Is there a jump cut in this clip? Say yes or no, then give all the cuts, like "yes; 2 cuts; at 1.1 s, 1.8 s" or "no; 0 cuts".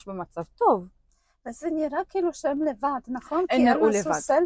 no; 0 cuts